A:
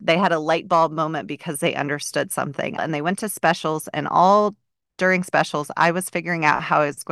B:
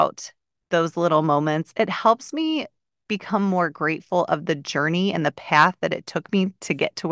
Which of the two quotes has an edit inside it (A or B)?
A